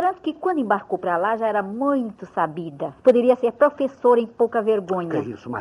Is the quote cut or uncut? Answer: cut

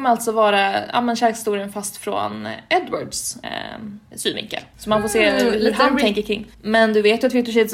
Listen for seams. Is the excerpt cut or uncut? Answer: cut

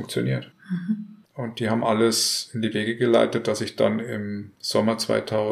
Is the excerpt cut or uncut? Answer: cut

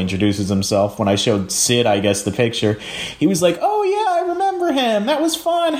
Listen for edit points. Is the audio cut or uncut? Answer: uncut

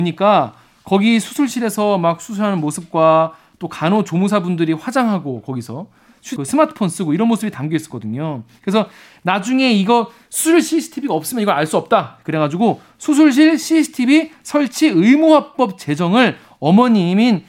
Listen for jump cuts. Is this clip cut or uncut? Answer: cut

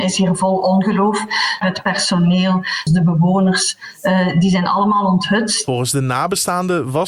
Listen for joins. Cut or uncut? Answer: cut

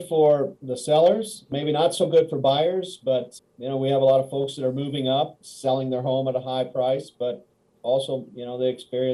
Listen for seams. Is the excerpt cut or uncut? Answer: uncut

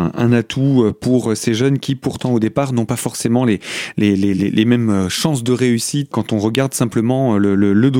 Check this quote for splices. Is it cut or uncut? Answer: cut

